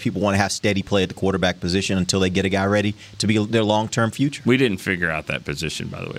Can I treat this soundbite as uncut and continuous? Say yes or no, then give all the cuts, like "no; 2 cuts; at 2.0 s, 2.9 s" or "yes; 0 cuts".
yes; 0 cuts